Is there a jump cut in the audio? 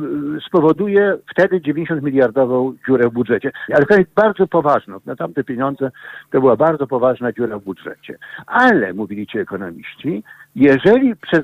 yes; 1 cut; at 3.7 s

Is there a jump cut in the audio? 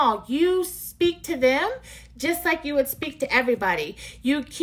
no; 0 cuts

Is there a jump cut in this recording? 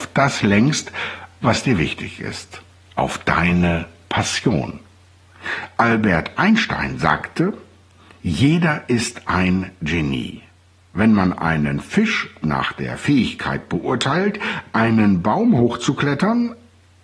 no; 0 cuts

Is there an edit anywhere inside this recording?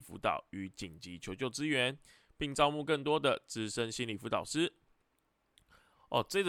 no; 0 cuts

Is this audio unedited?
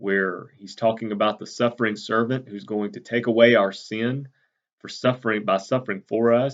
yes; 0 cuts

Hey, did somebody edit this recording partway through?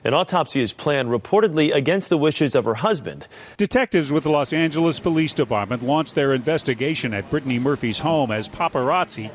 yes; 1 cut; at 3.5 s

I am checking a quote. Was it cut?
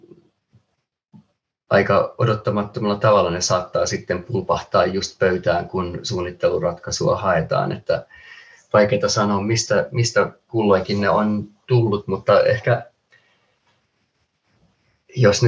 no; 0 cuts

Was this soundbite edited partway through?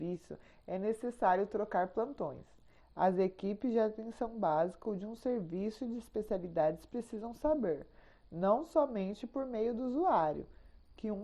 yes; 1 cut; at 2.8 s

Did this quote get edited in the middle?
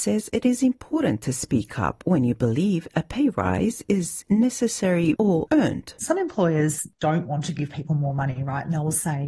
yes; 1 cut; at 5.1 s

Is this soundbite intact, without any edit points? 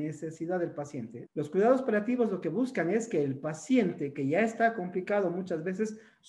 no; 1 cut; at 1.3 s

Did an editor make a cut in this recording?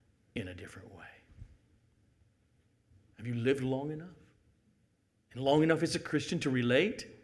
yes; 1 cut; at 3.0 s

